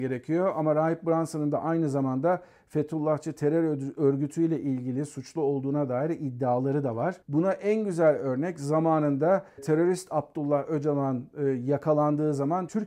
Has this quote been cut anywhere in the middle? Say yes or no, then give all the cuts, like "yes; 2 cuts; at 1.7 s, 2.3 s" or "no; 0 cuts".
yes; 1 cut; at 7.2 s